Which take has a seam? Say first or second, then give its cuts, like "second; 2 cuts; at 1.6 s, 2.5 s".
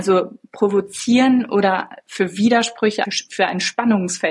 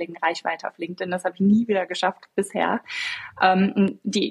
first; 1 cut; at 3.0 s